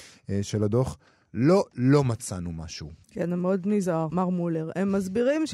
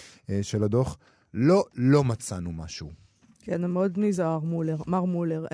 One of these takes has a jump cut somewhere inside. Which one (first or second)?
first